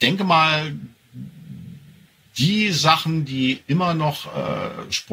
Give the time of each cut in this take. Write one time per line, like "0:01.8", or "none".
none